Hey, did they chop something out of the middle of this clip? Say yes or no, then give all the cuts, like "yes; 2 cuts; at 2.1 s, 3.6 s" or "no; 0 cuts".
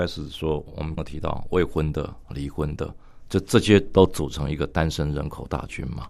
yes; 1 cut; at 1.0 s